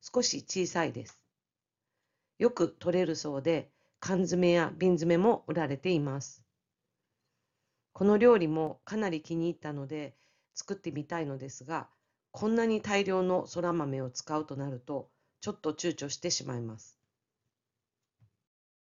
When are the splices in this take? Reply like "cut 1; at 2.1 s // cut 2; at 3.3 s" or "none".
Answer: none

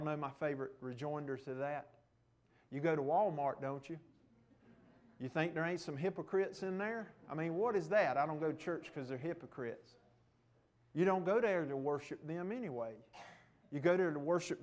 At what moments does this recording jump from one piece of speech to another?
none

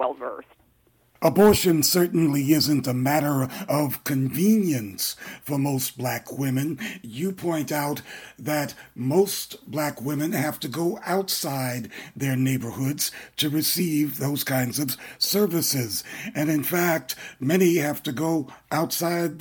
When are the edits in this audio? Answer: none

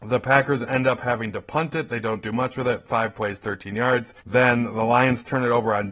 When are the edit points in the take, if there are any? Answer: cut 1; at 4.2 s

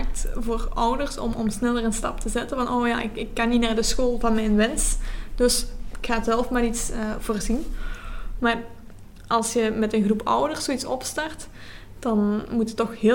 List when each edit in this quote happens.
cut 1; at 8.4 s

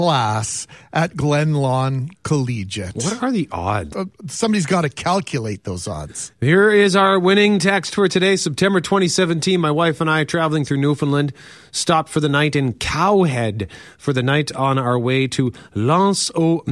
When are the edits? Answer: cut 1; at 3.9 s

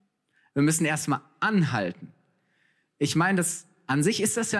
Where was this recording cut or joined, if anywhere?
none

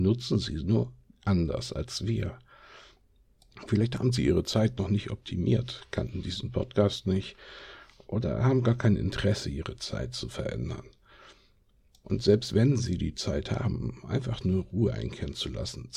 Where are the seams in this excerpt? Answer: none

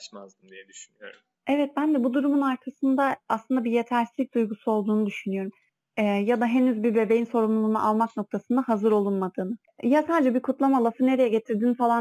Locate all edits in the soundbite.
none

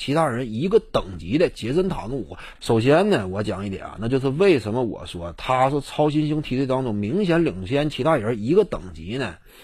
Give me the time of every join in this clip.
cut 1; at 2.6 s

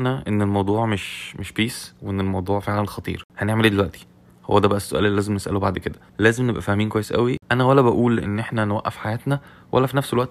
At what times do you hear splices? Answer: cut 1; at 6.1 s

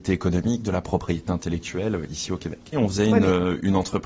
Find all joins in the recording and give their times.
cut 1; at 2.7 s

